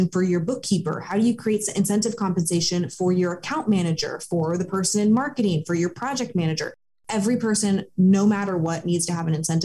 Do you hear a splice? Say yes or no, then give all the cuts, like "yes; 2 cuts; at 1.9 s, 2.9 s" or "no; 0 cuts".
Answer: no; 0 cuts